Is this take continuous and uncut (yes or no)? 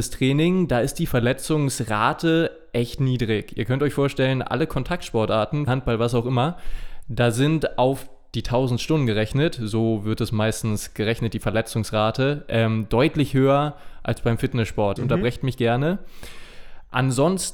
no